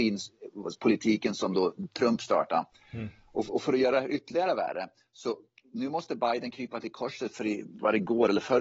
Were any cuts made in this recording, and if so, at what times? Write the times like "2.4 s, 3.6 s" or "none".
none